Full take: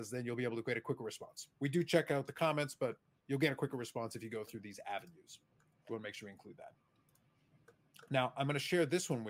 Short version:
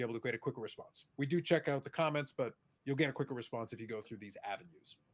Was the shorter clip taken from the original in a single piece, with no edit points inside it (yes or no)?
yes